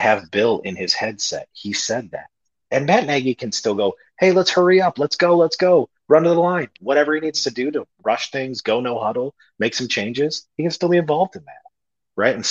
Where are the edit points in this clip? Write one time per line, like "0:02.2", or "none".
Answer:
0:02.6

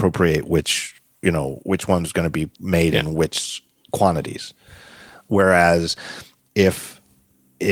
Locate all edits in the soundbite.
0:02.5

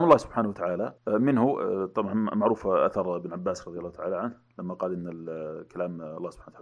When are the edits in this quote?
0:01.0

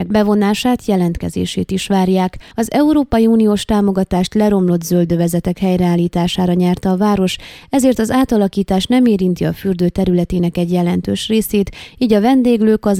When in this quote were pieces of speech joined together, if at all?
0:02.5

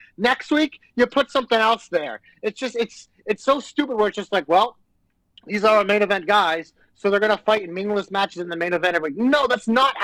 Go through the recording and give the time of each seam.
none

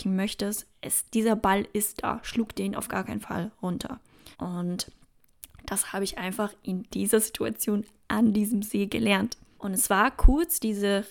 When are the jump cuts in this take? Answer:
0:04.3
0:09.6

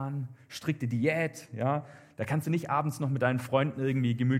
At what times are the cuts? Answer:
none

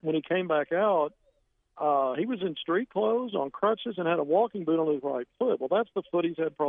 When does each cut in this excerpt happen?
none

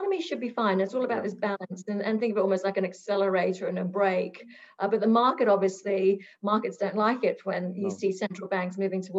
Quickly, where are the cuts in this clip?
none

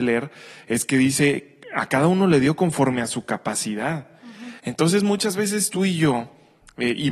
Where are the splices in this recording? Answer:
none

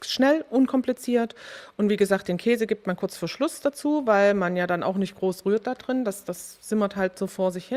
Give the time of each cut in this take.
none

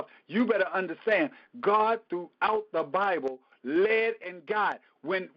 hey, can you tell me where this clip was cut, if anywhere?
none

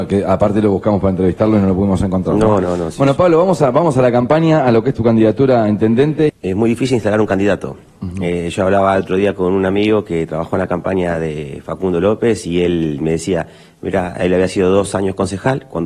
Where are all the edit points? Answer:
0:06.3

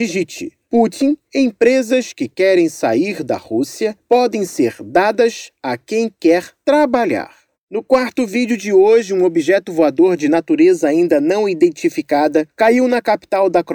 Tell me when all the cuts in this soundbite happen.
none

